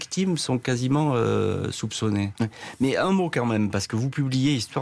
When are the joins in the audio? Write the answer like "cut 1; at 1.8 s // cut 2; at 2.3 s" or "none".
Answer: cut 1; at 2.4 s